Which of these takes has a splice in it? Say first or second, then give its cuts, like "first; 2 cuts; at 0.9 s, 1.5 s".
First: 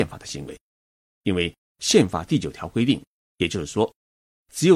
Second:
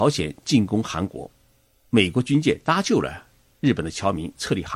first; 1 cut; at 3.3 s